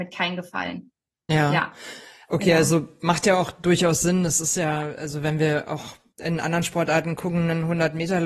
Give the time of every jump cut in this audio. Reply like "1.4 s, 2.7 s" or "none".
none